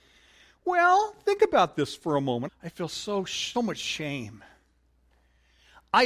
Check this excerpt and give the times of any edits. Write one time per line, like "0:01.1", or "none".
0:02.5
0:03.5